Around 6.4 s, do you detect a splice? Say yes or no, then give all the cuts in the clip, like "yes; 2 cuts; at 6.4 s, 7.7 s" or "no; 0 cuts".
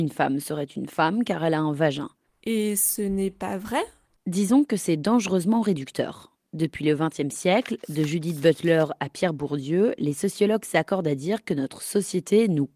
yes; 2 cuts; at 2.3 s, 6.4 s